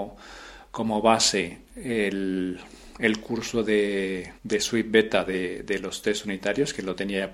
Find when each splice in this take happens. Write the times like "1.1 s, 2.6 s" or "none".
4.4 s